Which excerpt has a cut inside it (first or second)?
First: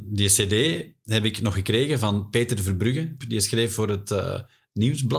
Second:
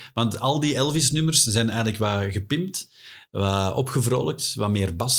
first